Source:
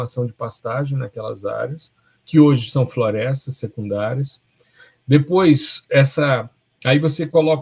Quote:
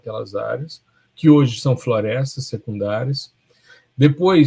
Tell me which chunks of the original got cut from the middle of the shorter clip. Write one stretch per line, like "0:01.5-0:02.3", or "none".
none